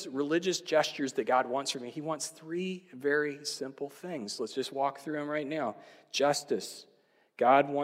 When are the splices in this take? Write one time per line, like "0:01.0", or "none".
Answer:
none

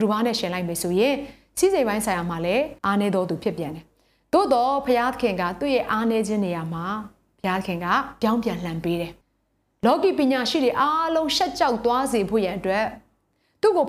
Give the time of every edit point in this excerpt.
0:02.8
0:09.2

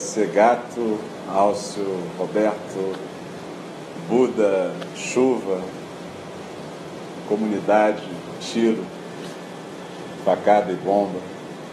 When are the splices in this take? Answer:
0:08.4

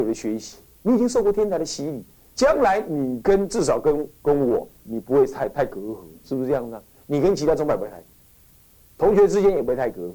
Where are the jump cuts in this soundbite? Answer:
none

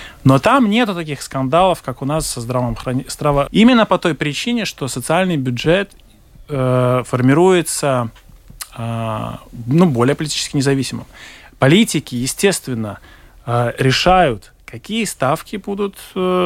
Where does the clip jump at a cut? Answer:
0:03.5

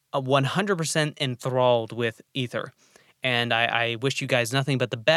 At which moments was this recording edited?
none

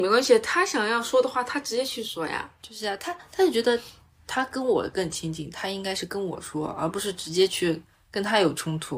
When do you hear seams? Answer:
none

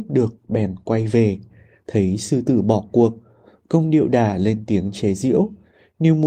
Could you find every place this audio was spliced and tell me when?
none

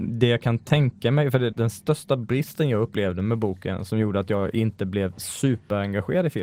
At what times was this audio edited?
0:01.5

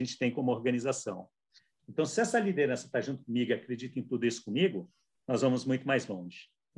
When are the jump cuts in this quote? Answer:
none

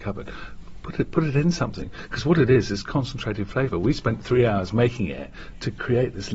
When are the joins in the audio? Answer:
none

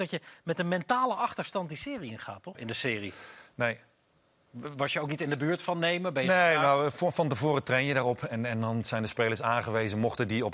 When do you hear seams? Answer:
0:02.5

